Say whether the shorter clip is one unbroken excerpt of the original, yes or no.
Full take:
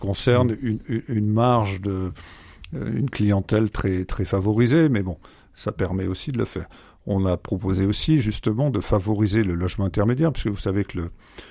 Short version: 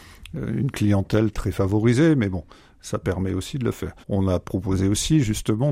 no